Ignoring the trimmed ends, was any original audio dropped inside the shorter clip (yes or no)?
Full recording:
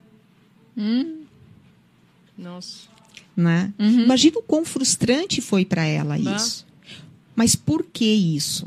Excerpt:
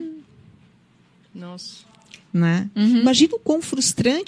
no